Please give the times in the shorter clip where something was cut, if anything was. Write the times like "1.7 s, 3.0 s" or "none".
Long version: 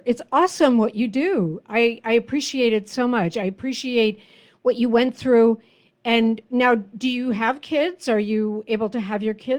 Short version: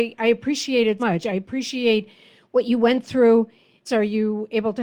1.0 s, 3.9 s